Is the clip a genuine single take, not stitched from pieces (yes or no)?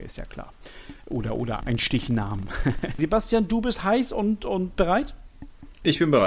no